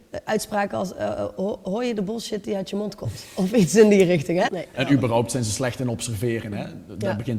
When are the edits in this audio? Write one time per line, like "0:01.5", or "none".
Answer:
0:04.5